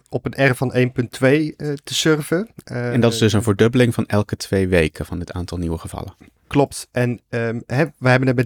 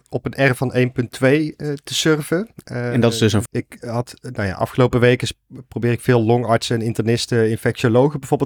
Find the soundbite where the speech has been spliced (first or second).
second